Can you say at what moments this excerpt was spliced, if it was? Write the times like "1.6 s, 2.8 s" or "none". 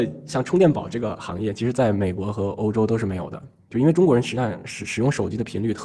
none